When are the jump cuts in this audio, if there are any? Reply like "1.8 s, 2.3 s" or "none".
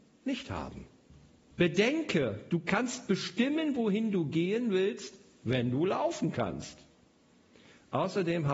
1.5 s